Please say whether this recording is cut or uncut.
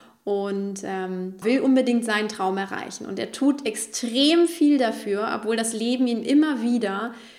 cut